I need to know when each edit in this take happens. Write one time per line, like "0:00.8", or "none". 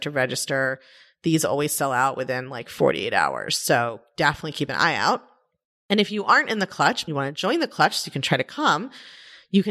0:07.1